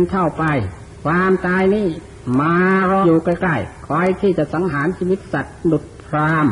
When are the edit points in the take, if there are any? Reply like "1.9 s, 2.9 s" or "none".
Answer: 3.0 s